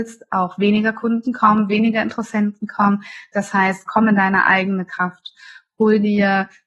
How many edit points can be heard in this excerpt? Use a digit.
2